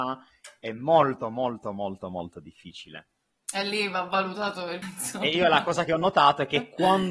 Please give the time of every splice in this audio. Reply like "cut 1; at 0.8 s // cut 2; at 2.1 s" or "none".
cut 1; at 4.8 s